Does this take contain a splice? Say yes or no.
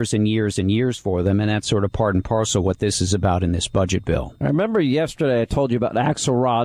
no